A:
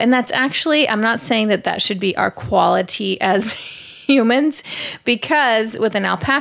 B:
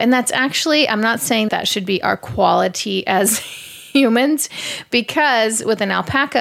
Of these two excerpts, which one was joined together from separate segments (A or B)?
B